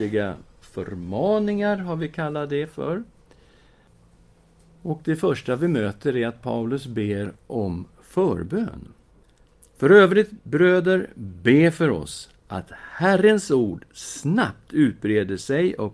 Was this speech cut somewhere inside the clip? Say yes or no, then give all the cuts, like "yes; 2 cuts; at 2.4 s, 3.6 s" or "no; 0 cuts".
no; 0 cuts